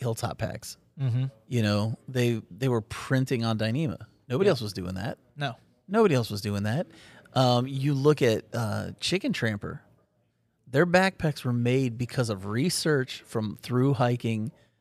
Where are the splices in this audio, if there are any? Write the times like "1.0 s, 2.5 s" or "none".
none